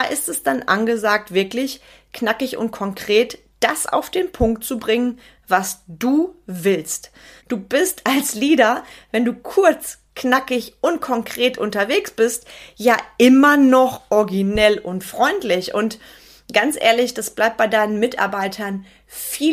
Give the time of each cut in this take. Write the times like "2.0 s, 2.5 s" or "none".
7.4 s

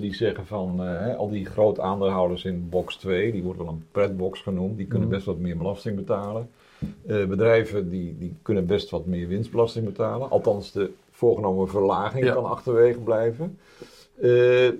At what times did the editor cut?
none

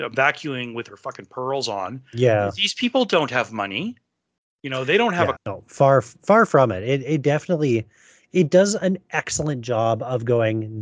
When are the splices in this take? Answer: 5.3 s

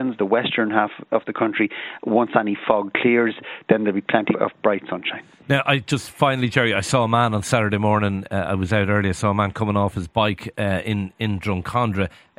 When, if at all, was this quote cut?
4.3 s

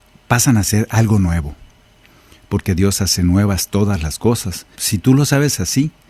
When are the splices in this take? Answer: 4.7 s

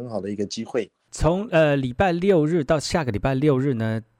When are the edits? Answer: 1.1 s

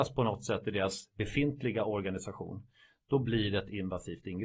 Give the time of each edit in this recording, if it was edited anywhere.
none

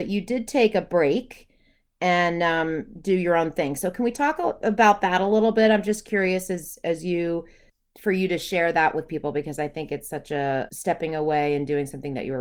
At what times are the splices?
10.7 s

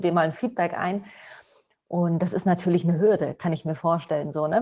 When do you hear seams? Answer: none

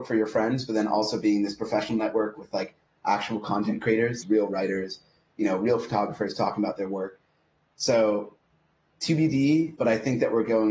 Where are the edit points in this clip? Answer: 4.2 s, 9.8 s

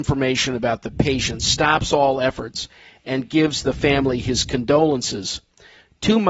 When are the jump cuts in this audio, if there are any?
none

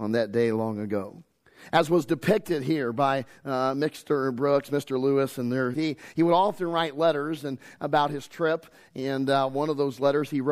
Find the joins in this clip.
5.7 s

